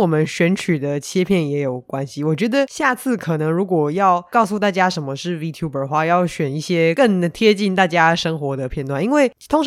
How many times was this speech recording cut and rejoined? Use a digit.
0